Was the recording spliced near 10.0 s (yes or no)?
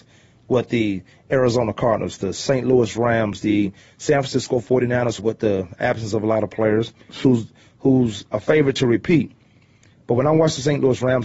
no